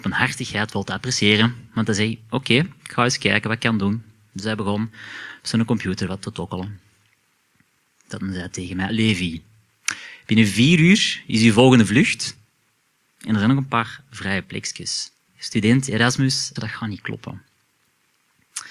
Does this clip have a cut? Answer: yes; 3 cuts; at 8.9 s, 15.3 s, 16.6 s

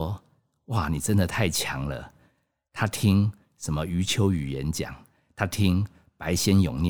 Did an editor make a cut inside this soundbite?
no; 0 cuts

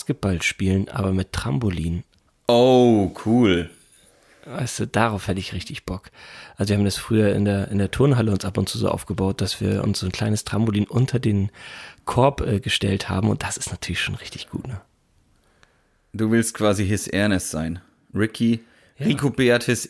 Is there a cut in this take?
no; 0 cuts

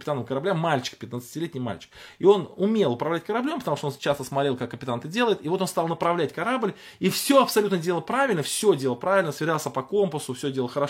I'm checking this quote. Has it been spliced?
no; 0 cuts

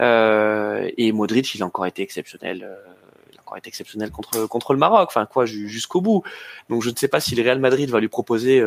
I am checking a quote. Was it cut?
no; 0 cuts

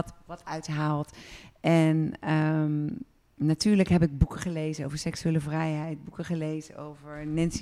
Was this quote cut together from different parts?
no; 0 cuts

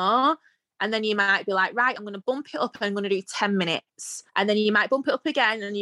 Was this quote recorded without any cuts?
no; 2 cuts; at 2.0 s, 4.3 s

